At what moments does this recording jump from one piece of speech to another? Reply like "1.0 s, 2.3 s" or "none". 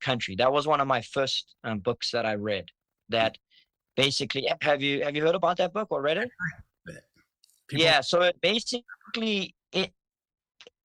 6.6 s